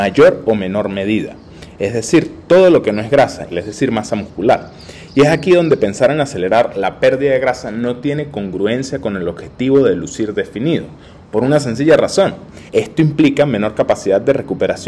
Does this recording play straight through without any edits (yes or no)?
no